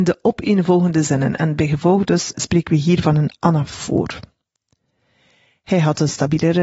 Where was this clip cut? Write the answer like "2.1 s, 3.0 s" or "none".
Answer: 2.3 s